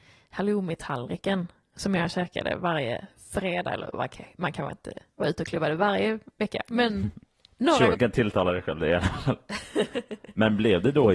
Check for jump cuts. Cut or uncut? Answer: cut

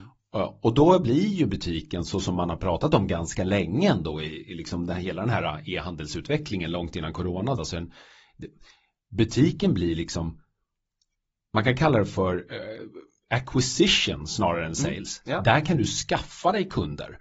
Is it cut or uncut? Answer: cut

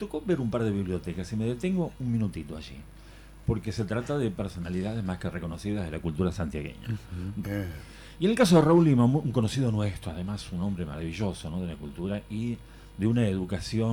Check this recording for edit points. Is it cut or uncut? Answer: cut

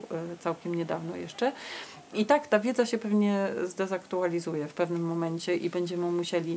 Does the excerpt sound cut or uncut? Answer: cut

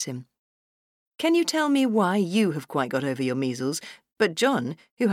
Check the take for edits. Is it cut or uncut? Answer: uncut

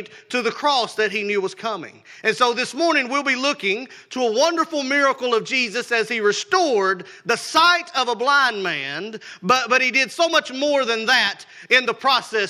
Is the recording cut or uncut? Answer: uncut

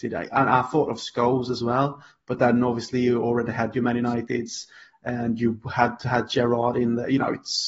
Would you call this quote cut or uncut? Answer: uncut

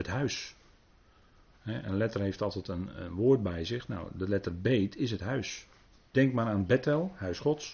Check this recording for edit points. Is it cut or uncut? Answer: cut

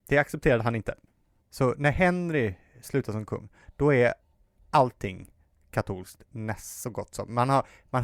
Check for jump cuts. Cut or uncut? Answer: cut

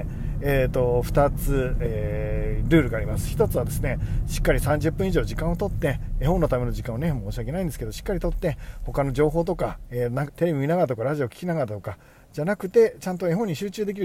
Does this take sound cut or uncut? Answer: cut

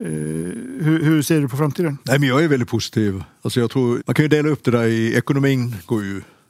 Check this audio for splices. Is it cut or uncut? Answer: cut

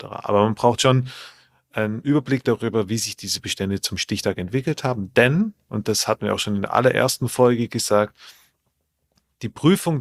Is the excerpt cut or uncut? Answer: uncut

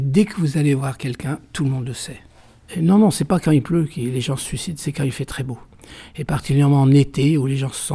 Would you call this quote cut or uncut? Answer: cut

